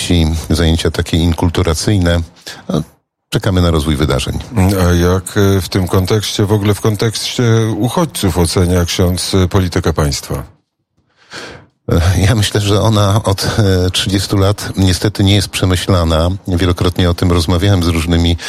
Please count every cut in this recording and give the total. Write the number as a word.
zero